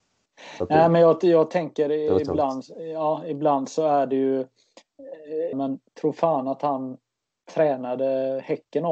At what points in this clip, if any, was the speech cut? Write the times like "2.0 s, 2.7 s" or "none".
5.5 s

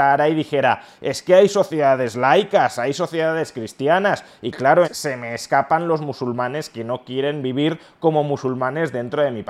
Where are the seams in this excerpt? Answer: 4.8 s

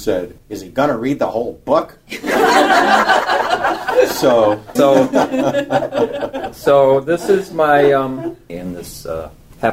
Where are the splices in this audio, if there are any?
4.8 s, 8.5 s

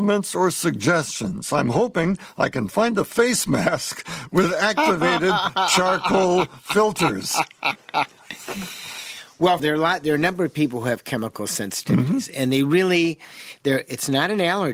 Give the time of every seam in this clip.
9.6 s

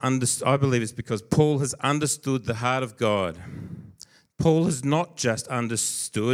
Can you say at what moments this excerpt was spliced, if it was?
4.3 s

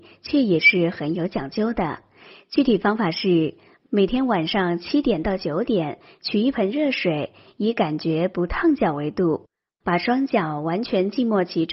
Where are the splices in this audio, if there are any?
none

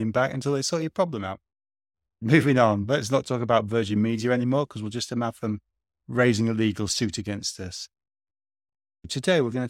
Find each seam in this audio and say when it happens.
none

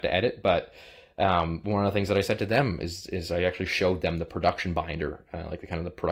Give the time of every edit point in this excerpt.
none

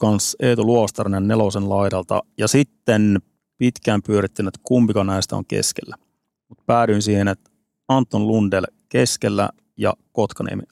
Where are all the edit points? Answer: none

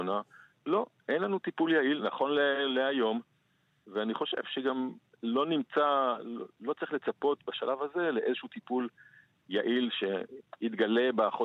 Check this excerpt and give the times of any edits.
none

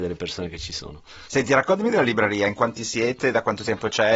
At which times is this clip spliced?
1.3 s

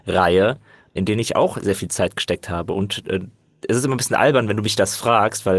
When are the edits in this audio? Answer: none

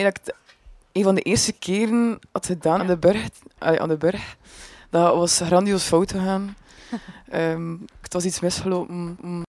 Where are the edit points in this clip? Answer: 2.8 s

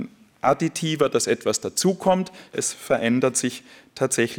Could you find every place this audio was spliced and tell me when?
2.5 s

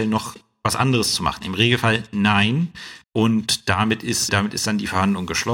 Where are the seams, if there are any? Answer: 3.0 s, 4.3 s

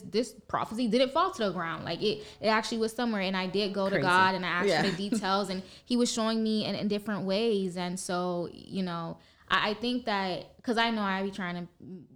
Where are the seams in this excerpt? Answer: none

